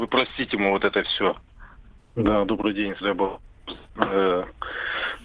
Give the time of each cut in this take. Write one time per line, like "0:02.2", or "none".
0:02.0
0:03.0

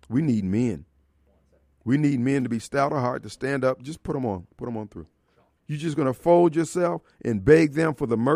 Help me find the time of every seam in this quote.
0:05.6

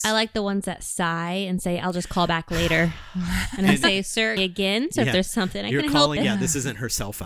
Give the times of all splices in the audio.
0:04.4
0:06.2

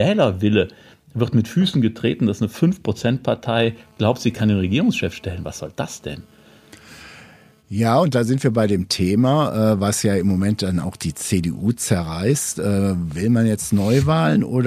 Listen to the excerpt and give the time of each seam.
none

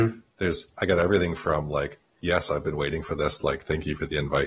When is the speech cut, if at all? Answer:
none

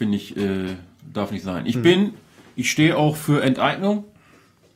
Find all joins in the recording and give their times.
none

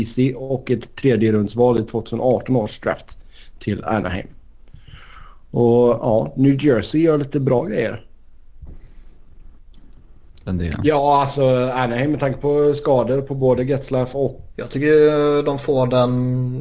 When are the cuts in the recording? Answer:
0:10.4
0:14.5

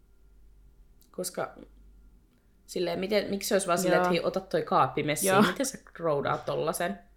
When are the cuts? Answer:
none

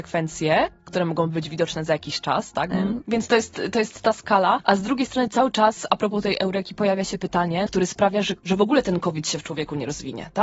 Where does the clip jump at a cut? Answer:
0:02.7
0:07.7

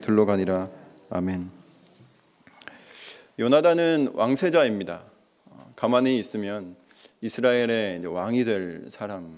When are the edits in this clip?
none

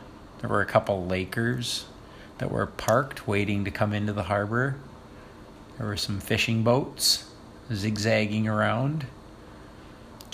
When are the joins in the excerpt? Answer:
none

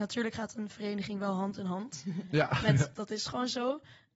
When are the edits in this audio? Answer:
0:02.9

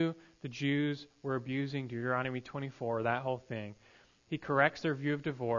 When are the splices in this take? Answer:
0:04.2

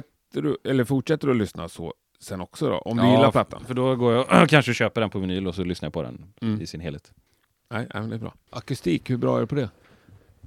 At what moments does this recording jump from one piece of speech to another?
0:08.4

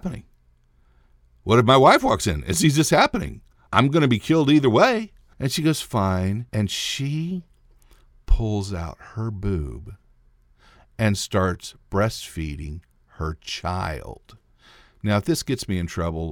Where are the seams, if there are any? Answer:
0:03.7
0:05.3
0:06.5

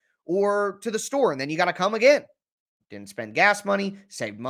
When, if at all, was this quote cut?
0:02.8

